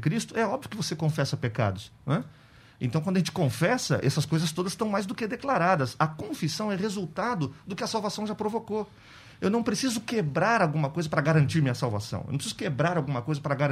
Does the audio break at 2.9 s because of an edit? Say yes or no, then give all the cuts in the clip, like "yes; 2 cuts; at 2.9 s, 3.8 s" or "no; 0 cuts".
no; 0 cuts